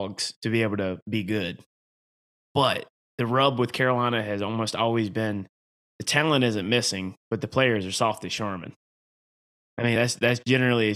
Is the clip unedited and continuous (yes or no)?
yes